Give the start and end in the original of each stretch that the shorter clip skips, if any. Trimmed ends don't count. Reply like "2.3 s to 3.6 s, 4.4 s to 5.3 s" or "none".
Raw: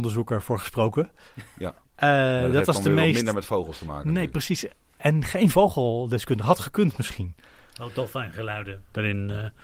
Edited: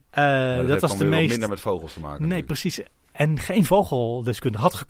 none